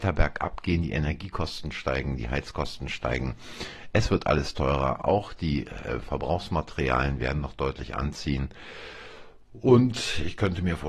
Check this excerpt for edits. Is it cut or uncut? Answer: uncut